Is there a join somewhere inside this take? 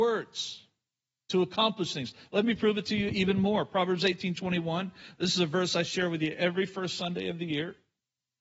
no; 0 cuts

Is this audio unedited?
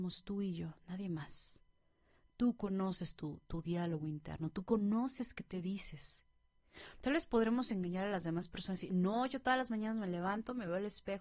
yes; 0 cuts

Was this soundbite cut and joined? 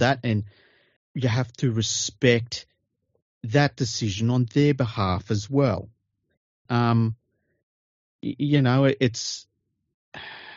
yes; 2 cuts; at 1.0 s, 6.7 s

